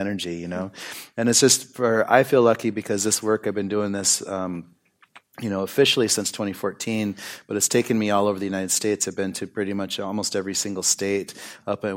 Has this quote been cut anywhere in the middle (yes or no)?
no